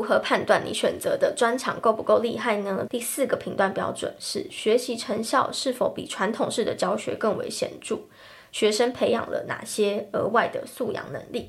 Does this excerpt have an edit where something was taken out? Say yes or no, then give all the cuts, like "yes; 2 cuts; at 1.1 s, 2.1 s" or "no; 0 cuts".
yes; 1 cut; at 2.9 s